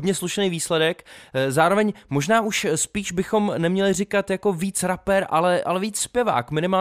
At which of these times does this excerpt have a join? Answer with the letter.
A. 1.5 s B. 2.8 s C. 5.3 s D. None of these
D